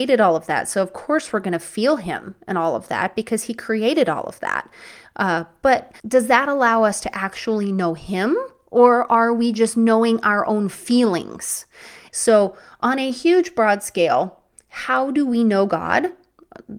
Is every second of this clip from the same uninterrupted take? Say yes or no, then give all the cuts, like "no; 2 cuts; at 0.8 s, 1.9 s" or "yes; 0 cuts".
no; 2 cuts; at 6.0 s, 12.1 s